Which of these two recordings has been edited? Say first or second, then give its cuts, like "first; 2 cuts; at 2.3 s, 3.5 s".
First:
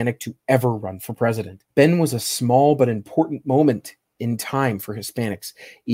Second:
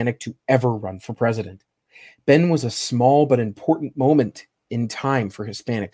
first; 1 cut; at 1.7 s